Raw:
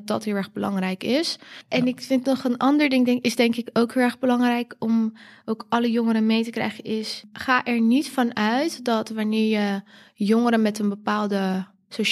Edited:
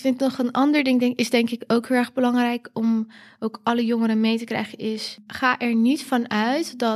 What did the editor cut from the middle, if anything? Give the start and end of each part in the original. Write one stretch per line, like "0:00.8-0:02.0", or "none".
none

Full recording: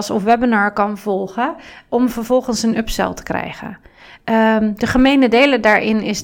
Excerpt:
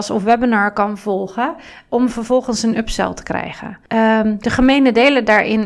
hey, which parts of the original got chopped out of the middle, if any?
0:03.9-0:04.2

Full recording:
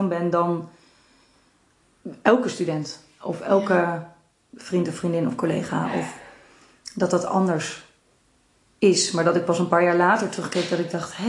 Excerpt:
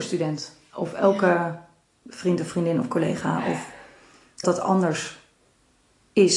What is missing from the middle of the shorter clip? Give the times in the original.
0:06.9-0:07.1

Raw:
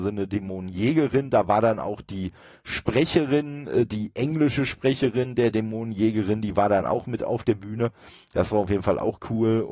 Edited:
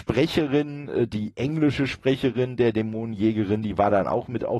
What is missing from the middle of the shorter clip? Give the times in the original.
none

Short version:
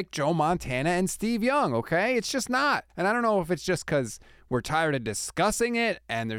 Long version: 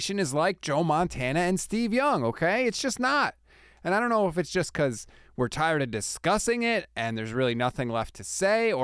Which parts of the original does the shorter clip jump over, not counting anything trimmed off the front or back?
0:03.4-0:03.8

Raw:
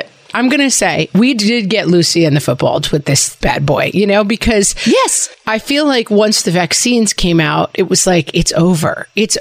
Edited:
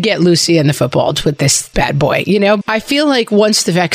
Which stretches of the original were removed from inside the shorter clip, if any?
0:04.3-0:05.4

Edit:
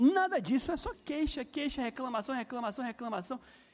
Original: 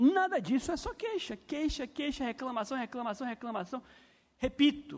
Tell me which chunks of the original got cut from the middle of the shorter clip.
0:00.9-0:01.4

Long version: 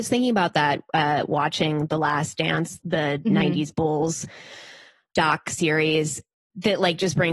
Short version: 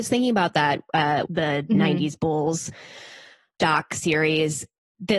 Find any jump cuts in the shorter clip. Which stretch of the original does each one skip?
0:01.3-0:02.8

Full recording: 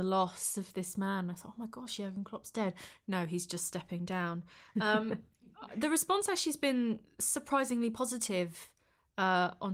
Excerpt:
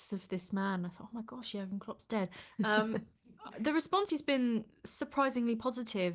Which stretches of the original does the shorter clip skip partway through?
0:03.0-0:04.7
0:06.3-0:06.4

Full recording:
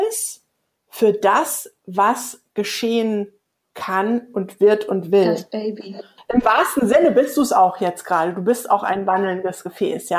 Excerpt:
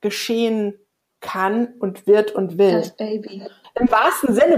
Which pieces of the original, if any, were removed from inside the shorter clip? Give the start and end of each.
none

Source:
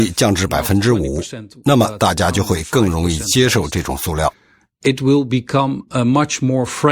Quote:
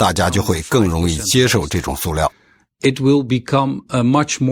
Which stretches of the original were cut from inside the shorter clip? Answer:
none

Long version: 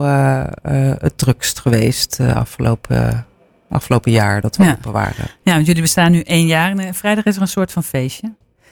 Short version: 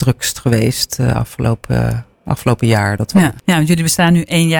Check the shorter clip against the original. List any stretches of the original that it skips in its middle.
0:03.3-0:03.6
0:04.8-0:05.4

